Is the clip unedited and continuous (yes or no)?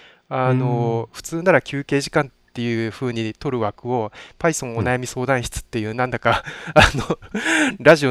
yes